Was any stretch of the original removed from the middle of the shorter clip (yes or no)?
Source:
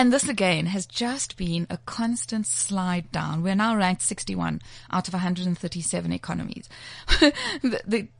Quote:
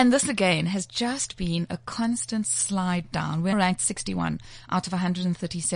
yes